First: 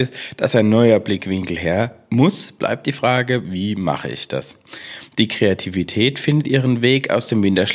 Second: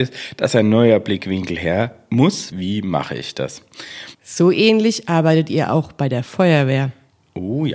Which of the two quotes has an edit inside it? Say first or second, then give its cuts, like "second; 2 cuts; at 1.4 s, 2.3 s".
second; 2 cuts; at 2.5 s, 4.1 s